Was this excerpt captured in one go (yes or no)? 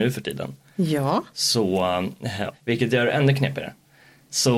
no